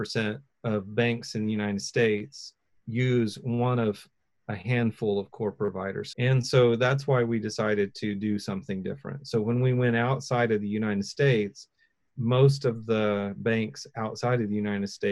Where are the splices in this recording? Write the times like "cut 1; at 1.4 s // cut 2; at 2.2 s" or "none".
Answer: cut 1; at 6.1 s